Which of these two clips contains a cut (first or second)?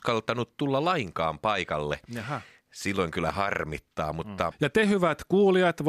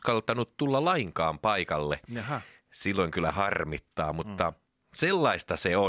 first